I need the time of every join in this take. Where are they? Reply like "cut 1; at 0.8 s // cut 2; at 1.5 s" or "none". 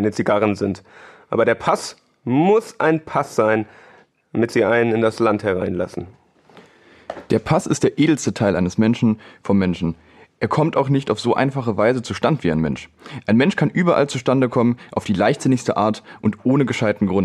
none